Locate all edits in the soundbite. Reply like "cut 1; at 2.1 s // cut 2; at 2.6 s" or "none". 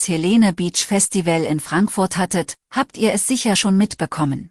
none

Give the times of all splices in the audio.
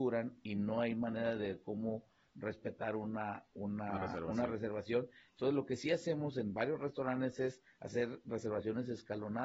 none

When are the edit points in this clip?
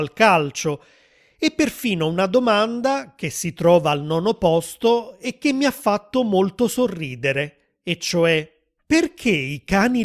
none

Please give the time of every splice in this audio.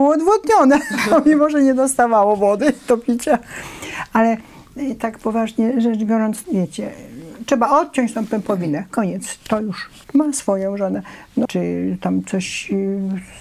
cut 1; at 6.4 s // cut 2; at 10.0 s // cut 3; at 11.5 s

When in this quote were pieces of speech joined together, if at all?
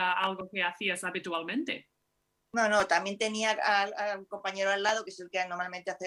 none

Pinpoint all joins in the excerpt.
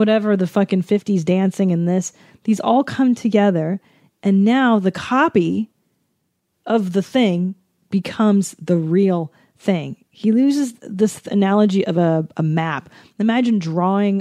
none

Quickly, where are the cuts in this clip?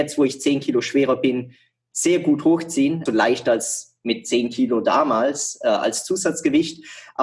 cut 1; at 3.1 s

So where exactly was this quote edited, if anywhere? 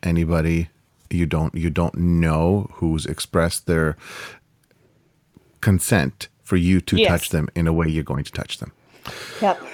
none

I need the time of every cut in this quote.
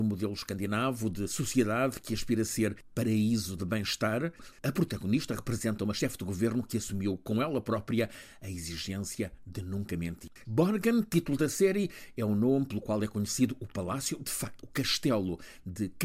cut 1; at 10.4 s

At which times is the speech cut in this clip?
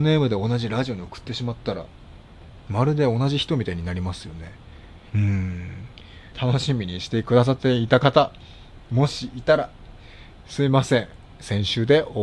cut 1; at 5.1 s // cut 2; at 6.3 s

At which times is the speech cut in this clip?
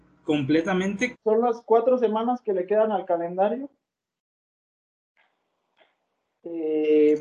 cut 1; at 1.1 s

